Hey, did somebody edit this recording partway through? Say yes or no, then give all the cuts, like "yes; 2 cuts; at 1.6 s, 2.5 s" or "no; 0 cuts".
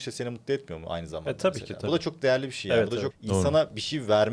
yes; 1 cut; at 3.1 s